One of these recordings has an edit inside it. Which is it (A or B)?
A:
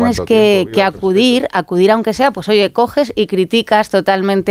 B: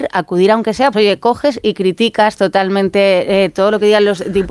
B